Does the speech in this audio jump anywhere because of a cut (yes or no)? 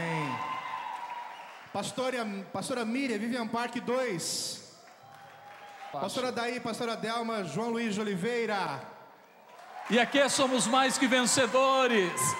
yes